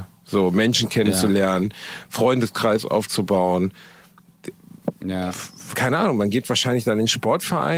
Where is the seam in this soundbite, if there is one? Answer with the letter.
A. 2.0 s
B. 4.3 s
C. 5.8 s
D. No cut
D